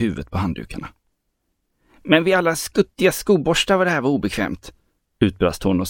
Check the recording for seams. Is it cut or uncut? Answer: uncut